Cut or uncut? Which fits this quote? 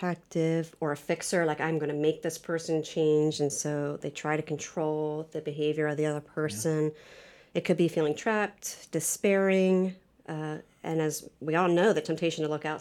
uncut